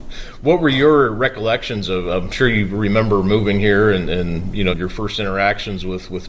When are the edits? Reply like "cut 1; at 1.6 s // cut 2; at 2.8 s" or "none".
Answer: cut 1; at 4.7 s